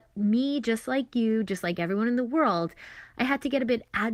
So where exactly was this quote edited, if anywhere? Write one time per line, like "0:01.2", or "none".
none